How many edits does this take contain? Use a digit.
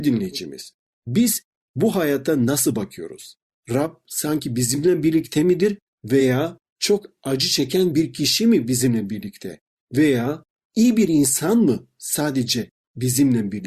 0